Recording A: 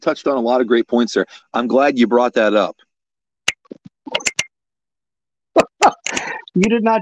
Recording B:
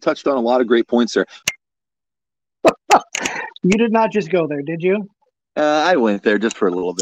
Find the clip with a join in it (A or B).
B